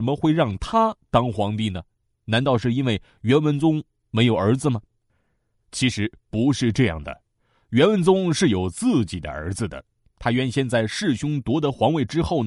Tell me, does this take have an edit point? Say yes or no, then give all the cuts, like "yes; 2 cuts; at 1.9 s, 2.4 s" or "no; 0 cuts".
no; 0 cuts